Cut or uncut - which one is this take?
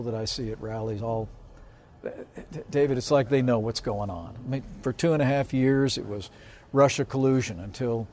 uncut